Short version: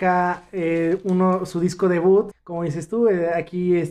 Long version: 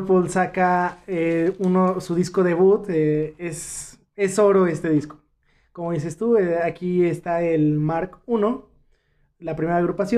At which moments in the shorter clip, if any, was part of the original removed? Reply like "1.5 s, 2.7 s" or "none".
2.3 s